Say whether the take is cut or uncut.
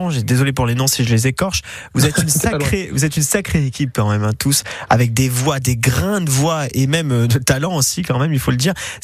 uncut